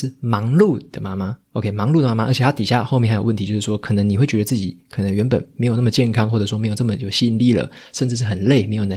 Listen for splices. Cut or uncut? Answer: uncut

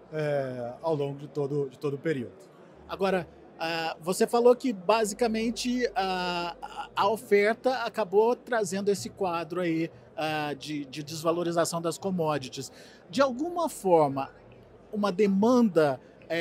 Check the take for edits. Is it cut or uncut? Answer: uncut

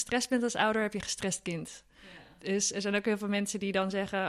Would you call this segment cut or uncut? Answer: uncut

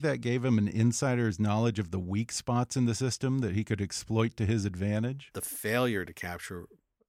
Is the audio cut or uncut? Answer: cut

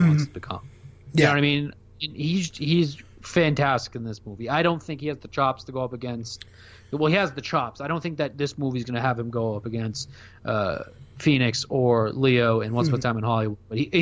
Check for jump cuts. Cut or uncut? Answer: uncut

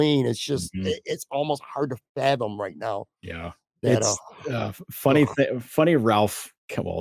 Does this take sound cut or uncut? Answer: uncut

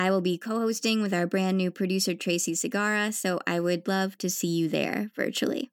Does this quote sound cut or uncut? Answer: uncut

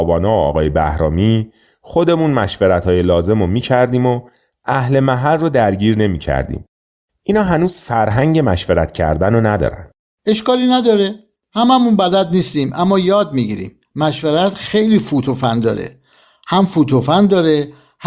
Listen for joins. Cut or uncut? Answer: uncut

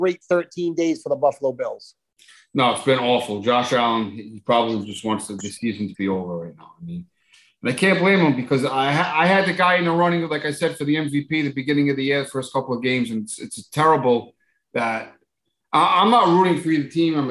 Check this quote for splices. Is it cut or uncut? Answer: uncut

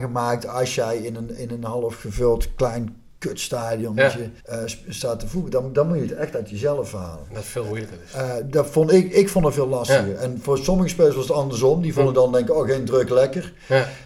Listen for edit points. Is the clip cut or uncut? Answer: cut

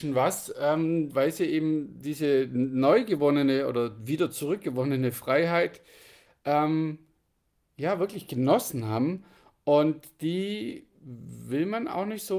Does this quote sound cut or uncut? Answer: cut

